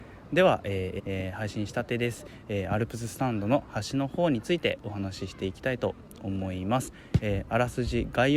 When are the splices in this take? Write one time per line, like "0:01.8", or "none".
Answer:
0:01.0

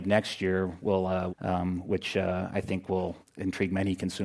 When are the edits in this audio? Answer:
0:01.3
0:03.2

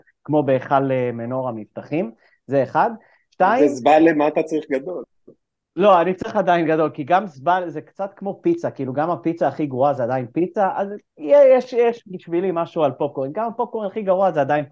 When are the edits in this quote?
none

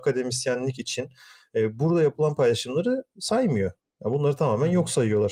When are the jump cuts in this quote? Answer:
none

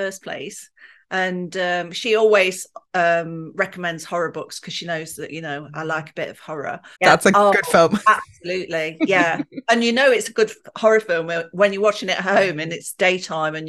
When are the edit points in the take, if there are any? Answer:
0:06.9

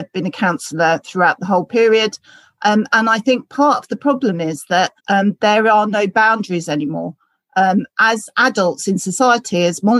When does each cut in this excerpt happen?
0:05.0

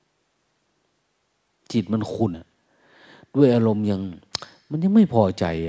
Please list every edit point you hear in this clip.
0:02.3

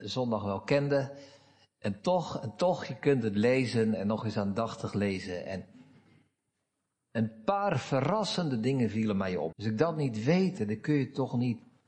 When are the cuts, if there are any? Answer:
0:09.5
0:10.6

